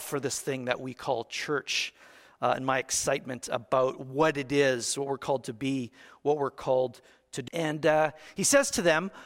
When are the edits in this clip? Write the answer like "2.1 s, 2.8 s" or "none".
7.5 s